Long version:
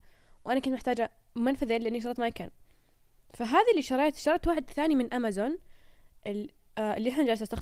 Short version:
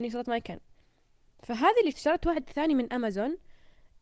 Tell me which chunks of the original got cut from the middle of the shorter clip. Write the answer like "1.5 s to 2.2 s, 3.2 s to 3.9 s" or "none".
3.8 s to 4.1 s